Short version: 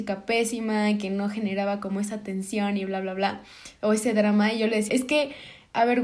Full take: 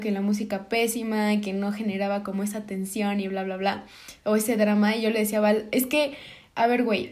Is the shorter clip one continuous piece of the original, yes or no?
no